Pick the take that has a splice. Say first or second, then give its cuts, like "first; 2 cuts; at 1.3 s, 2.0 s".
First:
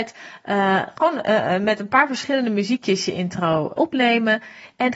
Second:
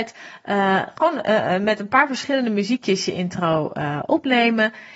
first; 1 cut; at 3.8 s